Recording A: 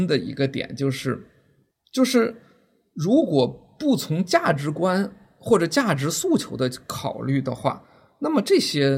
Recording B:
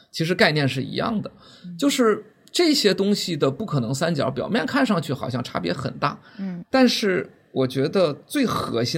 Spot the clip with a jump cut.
A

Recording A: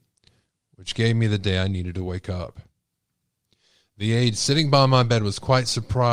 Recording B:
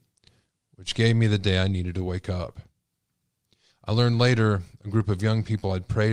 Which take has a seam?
B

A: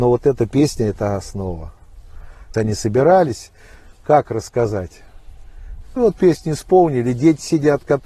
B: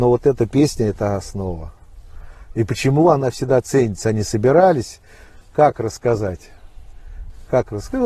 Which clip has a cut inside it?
A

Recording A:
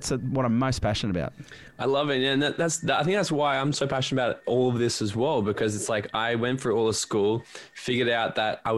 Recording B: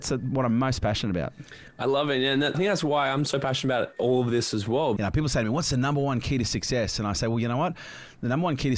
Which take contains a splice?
B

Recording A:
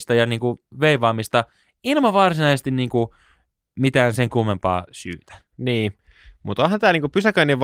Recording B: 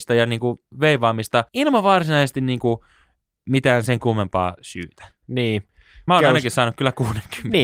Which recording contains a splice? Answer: B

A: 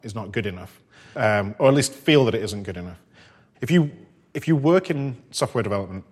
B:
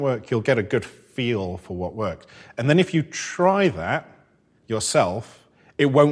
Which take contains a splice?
A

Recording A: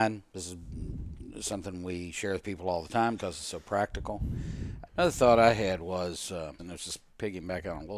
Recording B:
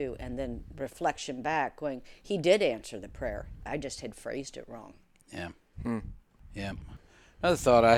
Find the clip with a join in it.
A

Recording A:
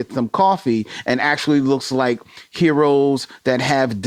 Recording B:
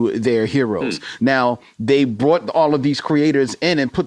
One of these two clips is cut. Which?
B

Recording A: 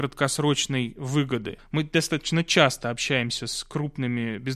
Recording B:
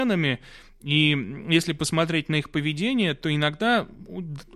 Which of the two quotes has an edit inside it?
A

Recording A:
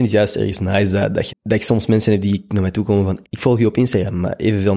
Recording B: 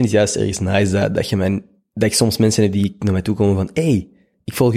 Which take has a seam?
A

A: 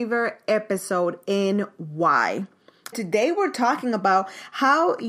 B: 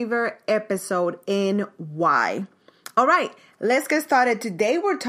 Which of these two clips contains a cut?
A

